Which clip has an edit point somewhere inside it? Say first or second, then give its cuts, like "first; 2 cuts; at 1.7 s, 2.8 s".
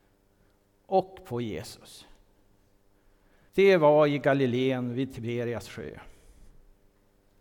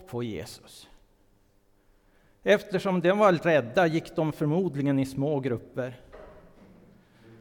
first; 1 cut; at 3.5 s